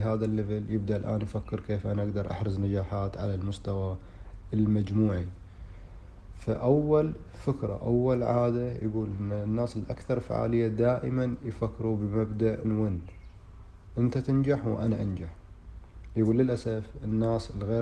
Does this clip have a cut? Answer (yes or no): yes